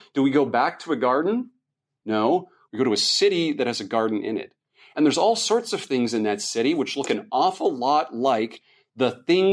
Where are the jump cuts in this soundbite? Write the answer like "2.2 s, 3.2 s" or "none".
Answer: 2.7 s